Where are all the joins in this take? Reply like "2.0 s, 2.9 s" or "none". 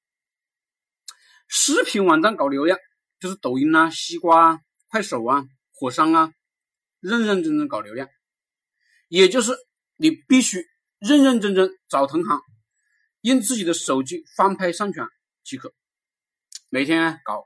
none